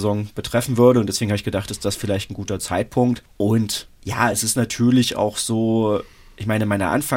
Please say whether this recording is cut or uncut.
uncut